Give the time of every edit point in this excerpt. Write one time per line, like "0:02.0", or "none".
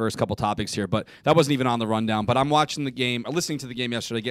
none